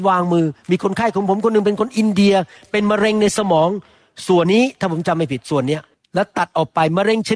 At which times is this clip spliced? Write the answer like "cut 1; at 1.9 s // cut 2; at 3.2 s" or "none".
cut 1; at 4.4 s